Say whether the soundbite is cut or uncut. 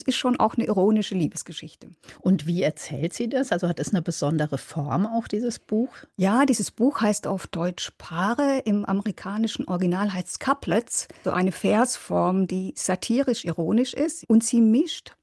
cut